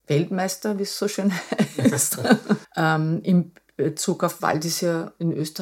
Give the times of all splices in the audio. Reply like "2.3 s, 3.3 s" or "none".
2.6 s, 4.4 s